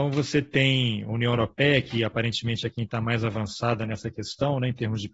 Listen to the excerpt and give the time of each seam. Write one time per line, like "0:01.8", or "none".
none